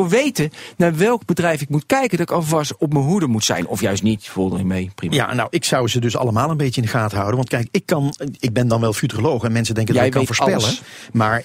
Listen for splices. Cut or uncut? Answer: uncut